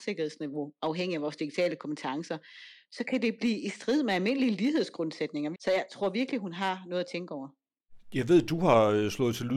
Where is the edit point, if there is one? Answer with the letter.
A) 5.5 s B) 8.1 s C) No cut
A